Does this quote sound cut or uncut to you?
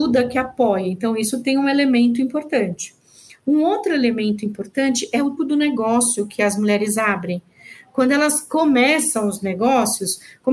cut